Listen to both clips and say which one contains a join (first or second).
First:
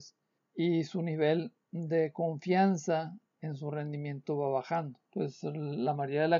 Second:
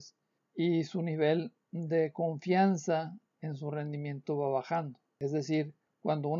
first